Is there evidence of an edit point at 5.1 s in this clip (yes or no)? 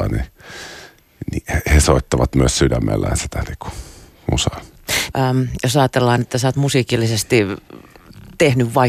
yes